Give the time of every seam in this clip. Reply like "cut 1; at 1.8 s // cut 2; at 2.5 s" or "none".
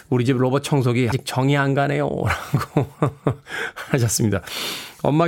cut 1; at 1.1 s

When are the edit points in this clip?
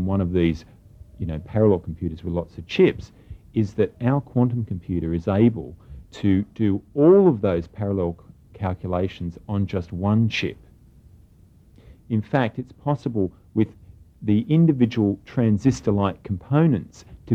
none

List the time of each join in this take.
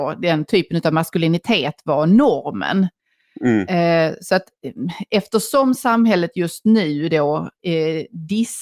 none

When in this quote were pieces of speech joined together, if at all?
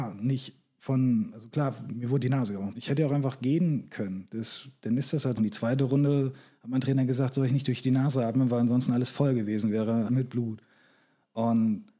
cut 1; at 2.7 s // cut 2; at 5.4 s // cut 3; at 10.1 s

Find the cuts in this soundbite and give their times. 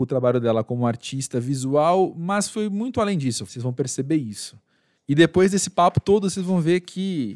cut 1; at 3.5 s // cut 2; at 5.0 s

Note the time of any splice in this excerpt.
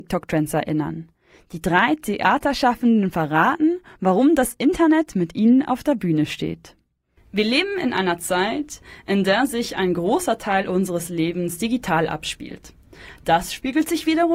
none

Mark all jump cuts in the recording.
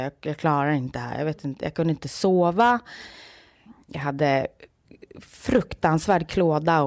none

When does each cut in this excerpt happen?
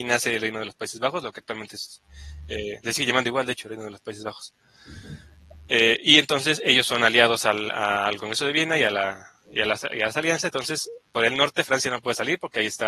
none

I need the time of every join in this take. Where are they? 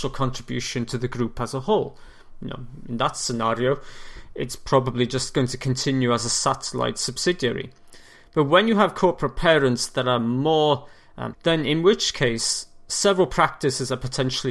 cut 1; at 11.3 s

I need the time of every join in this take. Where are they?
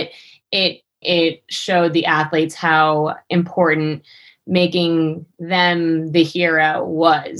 cut 1; at 1.0 s

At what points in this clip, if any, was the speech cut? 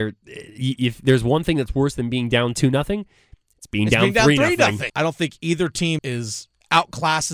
cut 1; at 4.9 s // cut 2; at 6.0 s

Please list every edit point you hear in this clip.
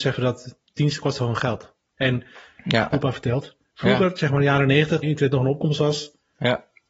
cut 1; at 2.9 s // cut 2; at 5.0 s

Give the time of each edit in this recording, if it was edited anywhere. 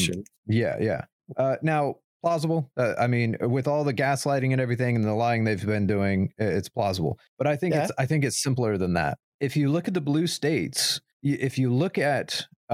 none

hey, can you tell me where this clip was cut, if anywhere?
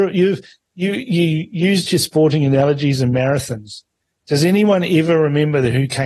none

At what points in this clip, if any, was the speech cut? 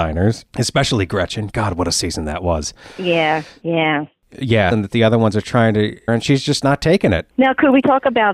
cut 1; at 4.7 s // cut 2; at 6.1 s // cut 3; at 7.3 s

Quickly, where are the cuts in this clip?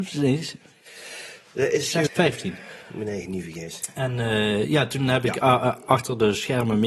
cut 1; at 2.1 s

